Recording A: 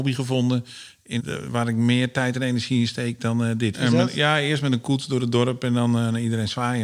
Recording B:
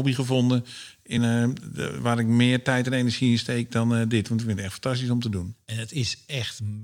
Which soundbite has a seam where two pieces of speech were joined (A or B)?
A